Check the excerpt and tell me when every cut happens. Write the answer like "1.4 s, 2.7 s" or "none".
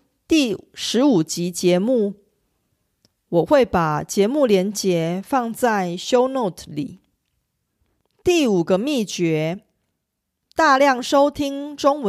none